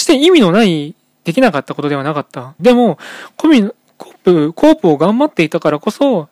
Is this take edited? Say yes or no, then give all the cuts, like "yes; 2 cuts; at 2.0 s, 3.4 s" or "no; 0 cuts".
yes; 1 cut; at 2.6 s